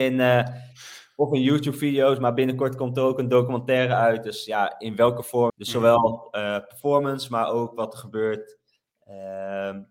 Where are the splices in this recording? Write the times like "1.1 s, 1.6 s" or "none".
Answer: 5.5 s